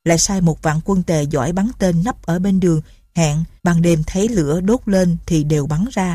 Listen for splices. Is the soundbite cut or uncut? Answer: cut